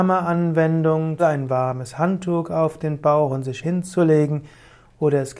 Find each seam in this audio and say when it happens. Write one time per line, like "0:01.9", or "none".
0:01.2